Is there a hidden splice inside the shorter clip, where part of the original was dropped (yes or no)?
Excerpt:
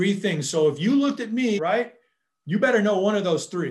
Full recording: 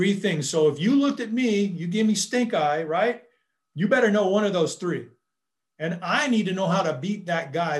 yes